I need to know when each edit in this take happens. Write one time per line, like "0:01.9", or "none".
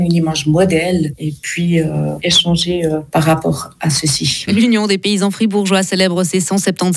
0:02.2
0:04.5